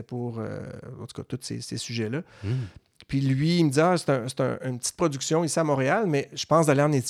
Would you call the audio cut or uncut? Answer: uncut